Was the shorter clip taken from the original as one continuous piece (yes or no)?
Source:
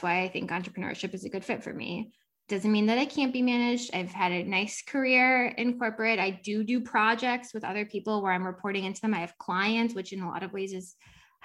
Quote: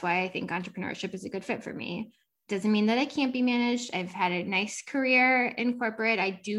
yes